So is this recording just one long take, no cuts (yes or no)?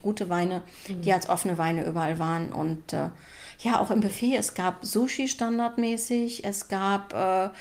yes